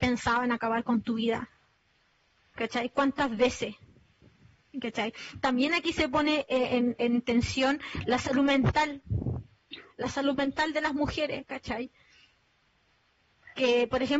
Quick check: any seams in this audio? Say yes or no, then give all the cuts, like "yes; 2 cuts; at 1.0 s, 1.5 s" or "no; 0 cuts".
no; 0 cuts